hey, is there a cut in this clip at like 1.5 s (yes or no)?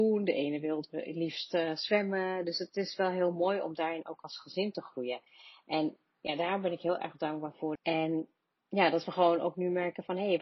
no